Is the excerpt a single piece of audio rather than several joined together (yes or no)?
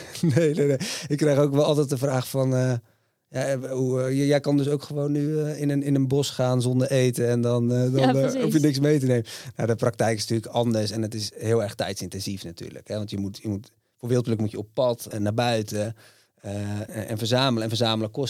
no